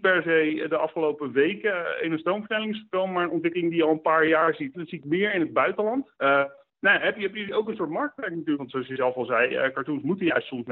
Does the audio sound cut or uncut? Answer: cut